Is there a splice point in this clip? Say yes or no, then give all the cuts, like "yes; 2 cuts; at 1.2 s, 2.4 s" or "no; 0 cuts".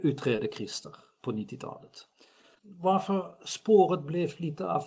yes; 1 cut; at 2.6 s